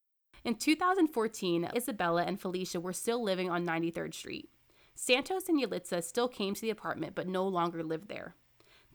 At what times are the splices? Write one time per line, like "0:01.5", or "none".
0:01.7